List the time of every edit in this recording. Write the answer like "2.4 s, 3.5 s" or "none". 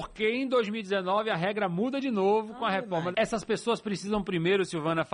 3.1 s